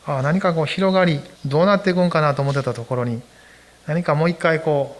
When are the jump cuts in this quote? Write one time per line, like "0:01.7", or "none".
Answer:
0:01.4